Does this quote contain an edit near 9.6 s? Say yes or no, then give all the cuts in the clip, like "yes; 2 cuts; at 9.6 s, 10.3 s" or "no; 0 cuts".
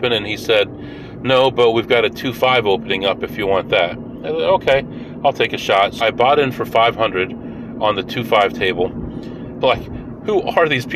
yes; 2 cuts; at 6.0 s, 9.6 s